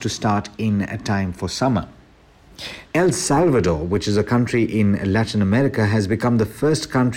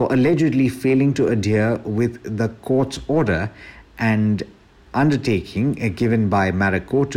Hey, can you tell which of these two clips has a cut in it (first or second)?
first